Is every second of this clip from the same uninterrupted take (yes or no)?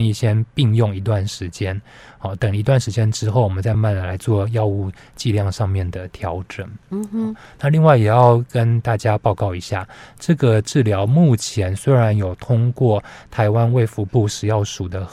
no